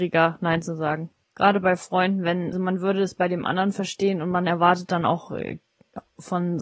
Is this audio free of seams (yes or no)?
no